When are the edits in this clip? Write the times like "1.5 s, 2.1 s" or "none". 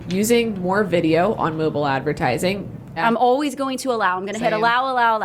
3.0 s